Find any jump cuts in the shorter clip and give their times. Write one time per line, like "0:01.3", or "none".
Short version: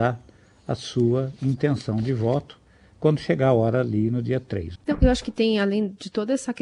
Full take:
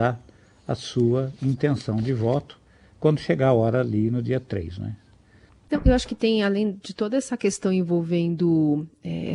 0:04.8